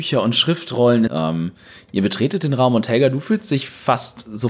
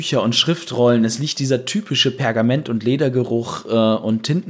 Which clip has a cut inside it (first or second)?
first